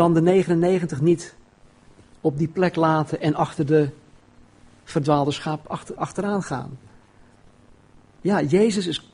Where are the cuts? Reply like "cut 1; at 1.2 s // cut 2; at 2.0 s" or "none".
cut 1; at 6.0 s

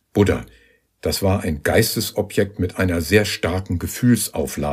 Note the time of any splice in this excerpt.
none

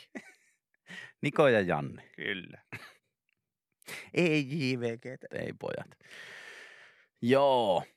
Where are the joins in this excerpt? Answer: cut 1; at 3.0 s // cut 2; at 5.3 s

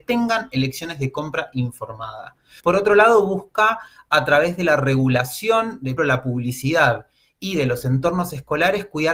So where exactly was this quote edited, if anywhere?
cut 1; at 2.6 s // cut 2; at 6.0 s

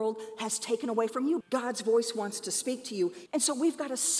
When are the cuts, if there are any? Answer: cut 1; at 1.4 s // cut 2; at 3.3 s

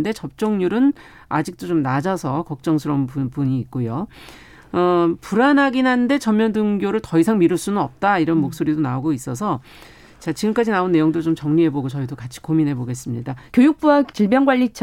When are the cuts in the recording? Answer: cut 1; at 13.5 s

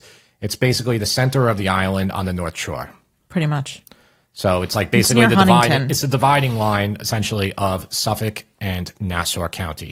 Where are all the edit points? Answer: none

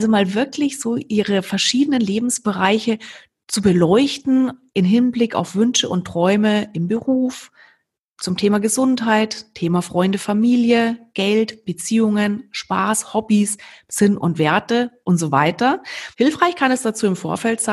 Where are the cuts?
cut 1; at 13.9 s // cut 2; at 16.1 s

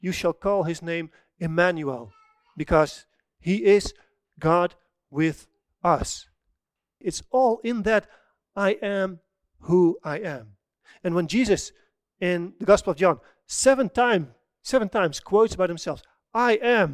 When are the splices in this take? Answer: cut 1; at 7.0 s

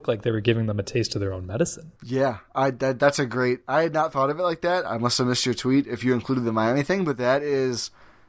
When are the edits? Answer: cut 1; at 1.9 s

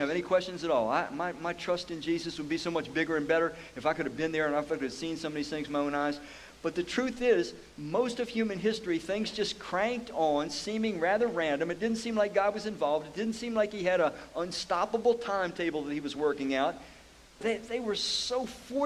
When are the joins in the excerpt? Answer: cut 1; at 17.4 s

